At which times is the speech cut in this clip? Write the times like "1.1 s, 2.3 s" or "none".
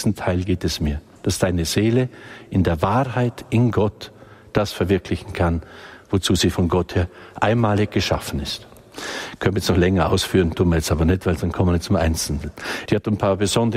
12.9 s